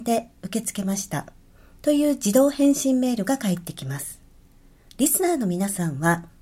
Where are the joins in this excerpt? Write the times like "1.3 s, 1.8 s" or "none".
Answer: 4.9 s